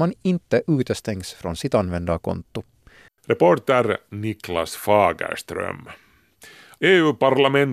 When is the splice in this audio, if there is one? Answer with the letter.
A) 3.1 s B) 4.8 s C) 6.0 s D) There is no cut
A